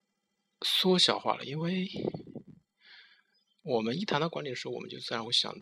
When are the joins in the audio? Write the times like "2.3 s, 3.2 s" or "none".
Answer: none